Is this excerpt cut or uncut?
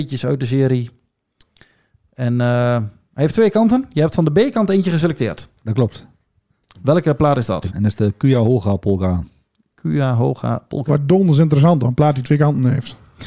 cut